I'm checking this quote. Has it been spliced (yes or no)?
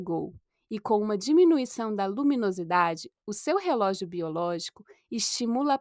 no